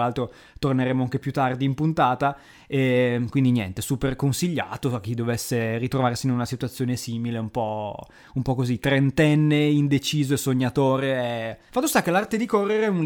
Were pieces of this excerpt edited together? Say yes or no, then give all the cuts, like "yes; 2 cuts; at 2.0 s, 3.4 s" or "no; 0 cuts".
yes; 1 cut; at 11.7 s